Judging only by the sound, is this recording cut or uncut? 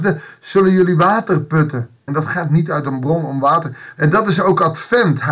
cut